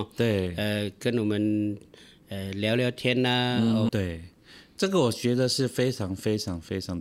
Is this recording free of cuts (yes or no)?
no